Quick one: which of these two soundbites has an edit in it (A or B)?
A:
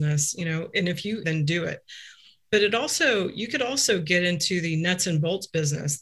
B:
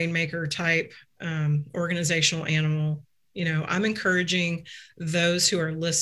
A